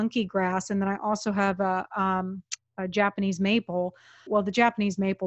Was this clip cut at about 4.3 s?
yes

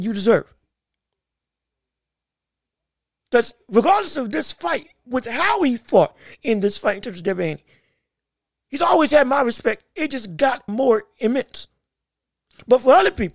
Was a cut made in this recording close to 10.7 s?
yes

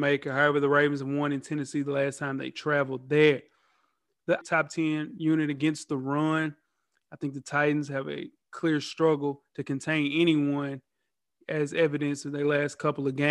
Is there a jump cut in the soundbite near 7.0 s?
no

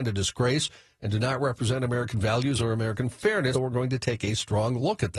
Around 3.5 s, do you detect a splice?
yes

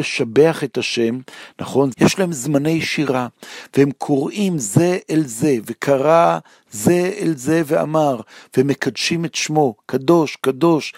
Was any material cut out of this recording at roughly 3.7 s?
no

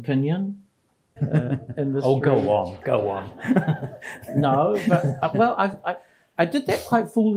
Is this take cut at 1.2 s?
yes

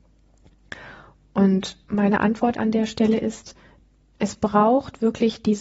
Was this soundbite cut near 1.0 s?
no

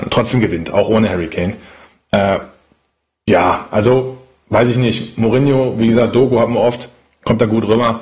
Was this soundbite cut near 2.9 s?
no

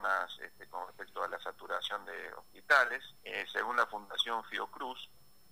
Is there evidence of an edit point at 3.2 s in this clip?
yes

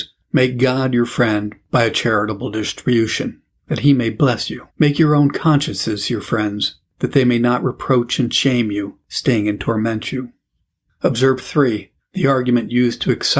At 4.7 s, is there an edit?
yes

